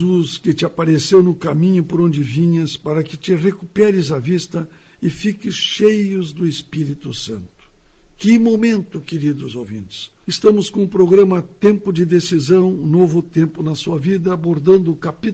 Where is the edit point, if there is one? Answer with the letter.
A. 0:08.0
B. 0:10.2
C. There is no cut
B